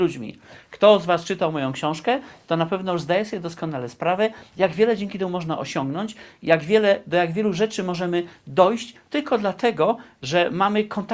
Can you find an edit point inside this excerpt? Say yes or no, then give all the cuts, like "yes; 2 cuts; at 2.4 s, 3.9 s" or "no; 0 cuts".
no; 0 cuts